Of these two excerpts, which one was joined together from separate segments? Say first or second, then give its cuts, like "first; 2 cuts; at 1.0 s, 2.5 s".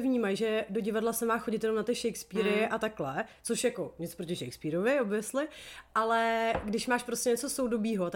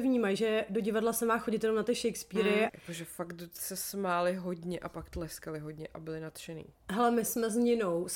second; 1 cut; at 2.7 s